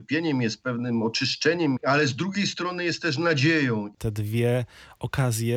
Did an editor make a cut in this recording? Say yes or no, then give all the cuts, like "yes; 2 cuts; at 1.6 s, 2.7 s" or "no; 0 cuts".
yes; 2 cuts; at 1.8 s, 4.0 s